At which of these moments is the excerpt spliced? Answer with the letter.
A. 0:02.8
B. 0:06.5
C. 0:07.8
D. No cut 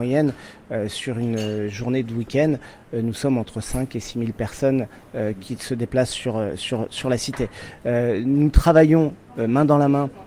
D